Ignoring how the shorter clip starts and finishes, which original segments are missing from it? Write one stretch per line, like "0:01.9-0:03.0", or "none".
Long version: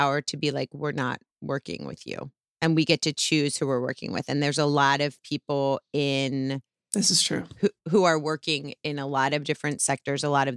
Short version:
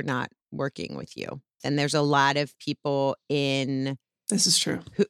0:02.5-0:04.2